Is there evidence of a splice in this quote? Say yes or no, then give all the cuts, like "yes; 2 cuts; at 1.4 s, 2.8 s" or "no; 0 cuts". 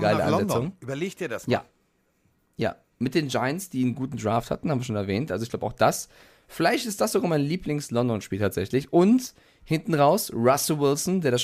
no; 0 cuts